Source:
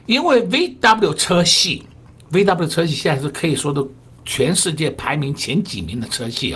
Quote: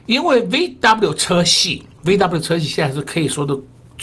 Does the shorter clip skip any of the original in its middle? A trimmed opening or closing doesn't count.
yes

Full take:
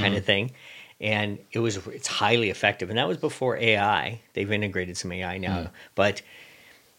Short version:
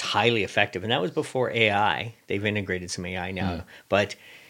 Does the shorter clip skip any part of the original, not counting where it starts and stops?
no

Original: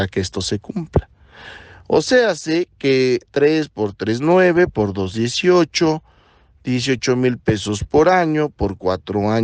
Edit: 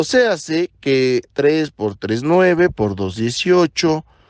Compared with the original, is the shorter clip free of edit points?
yes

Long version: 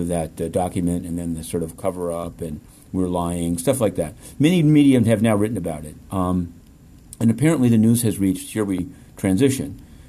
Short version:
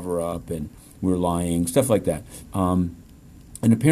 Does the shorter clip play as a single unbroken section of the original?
no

